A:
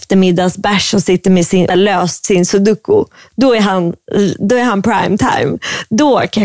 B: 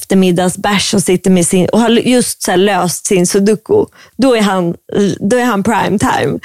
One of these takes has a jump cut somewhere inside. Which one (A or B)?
A